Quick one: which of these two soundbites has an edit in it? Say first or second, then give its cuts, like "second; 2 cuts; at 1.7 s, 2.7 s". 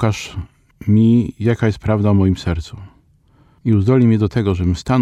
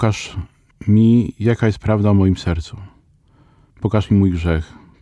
first; 1 cut; at 3.6 s